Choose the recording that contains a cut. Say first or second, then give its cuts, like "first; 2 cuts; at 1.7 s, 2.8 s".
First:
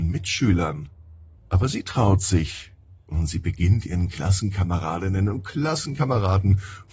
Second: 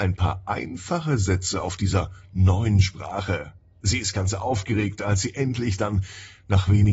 first; 1 cut; at 1.3 s